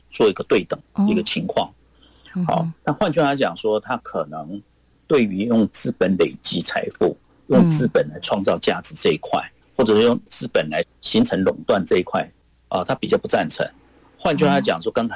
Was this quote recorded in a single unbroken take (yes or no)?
yes